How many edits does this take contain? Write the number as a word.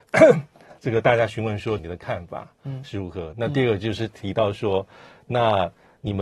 two